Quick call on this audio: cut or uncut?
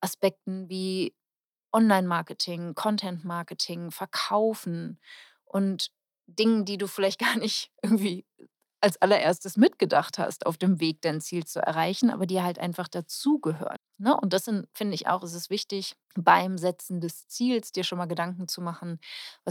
cut